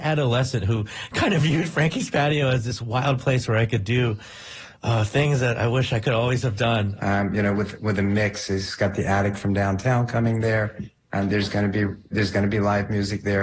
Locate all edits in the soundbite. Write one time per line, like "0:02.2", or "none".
0:07.0
0:12.1